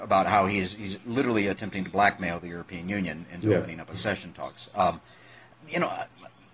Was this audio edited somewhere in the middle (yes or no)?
no